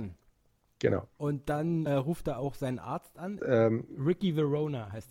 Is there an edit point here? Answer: yes; 2 cuts; at 1.9 s, 3.4 s

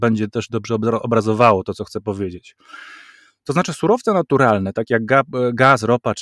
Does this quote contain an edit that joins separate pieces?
no; 0 cuts

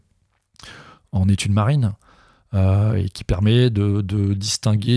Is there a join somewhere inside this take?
no; 0 cuts

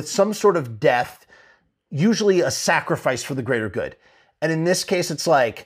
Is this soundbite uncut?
yes; 0 cuts

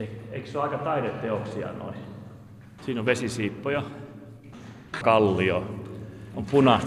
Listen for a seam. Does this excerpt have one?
yes; 2 cuts; at 2.8 s, 5.0 s

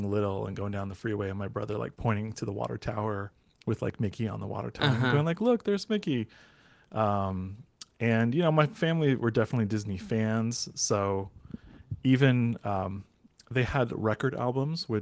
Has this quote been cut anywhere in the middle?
no; 0 cuts

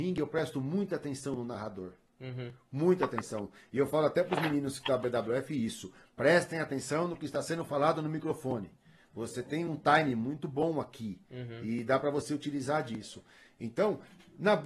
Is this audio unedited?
yes; 0 cuts

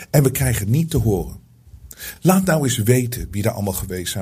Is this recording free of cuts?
yes; 0 cuts

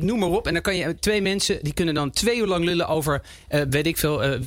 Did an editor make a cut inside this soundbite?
no; 0 cuts

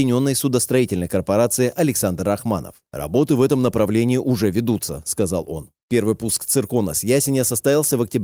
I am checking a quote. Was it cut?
no; 0 cuts

